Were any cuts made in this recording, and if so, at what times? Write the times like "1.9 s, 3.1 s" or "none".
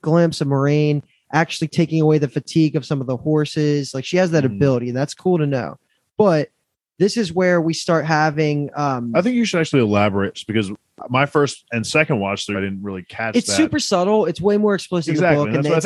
10.3 s, 12.5 s